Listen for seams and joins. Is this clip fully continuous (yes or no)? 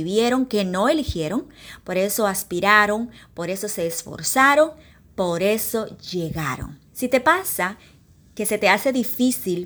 no